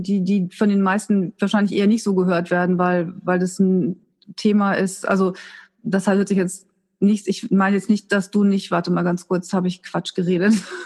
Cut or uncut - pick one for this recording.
uncut